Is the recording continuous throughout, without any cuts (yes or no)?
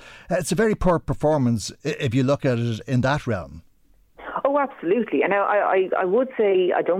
yes